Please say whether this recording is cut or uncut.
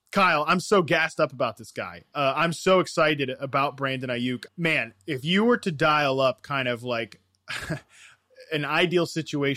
cut